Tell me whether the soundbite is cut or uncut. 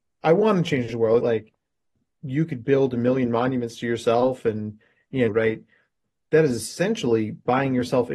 cut